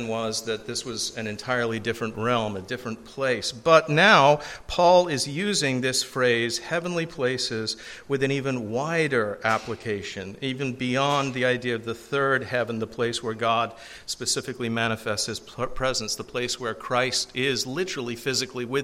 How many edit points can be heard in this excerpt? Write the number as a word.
zero